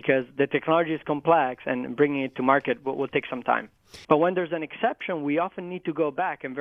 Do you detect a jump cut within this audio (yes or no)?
yes